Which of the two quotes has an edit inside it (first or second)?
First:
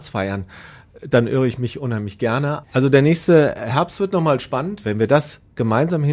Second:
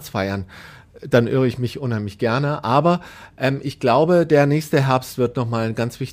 first